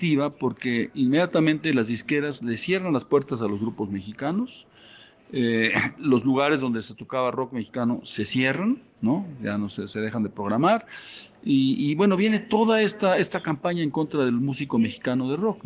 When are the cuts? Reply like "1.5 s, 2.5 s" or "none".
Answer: none